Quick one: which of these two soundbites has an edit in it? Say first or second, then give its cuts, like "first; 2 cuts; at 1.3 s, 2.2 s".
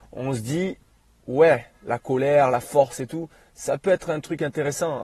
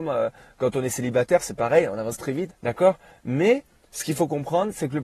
second; 1 cut; at 2.5 s